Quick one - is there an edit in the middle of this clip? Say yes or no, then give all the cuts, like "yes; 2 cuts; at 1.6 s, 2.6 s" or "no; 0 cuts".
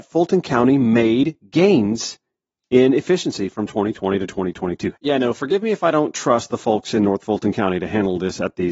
yes; 1 cut; at 4.9 s